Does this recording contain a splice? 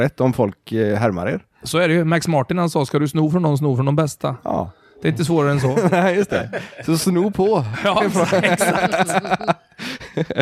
no; 0 cuts

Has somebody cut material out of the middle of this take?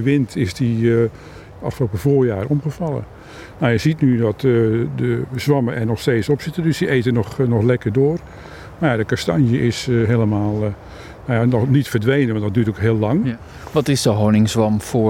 yes; 1 cut; at 1.5 s

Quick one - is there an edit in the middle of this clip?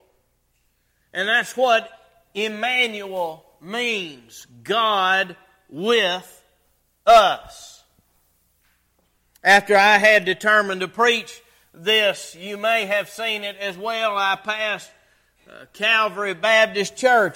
no; 0 cuts

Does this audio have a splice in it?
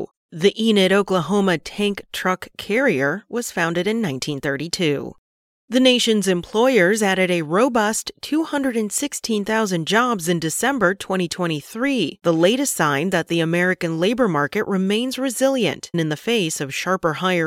yes; 1 cut; at 15.9 s

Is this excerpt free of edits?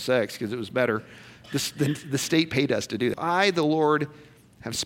no; 1 cut; at 3.1 s

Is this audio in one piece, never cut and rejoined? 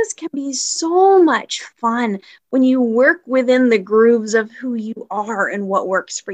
yes; 0 cuts

